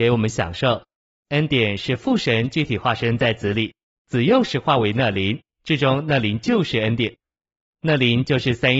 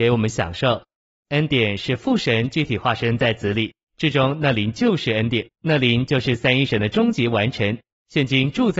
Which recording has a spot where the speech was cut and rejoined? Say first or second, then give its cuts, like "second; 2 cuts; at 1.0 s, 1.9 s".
second; 2 cuts; at 3.9 s, 5.5 s